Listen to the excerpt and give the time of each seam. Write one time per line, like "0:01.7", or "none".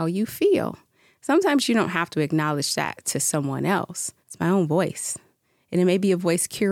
0:04.2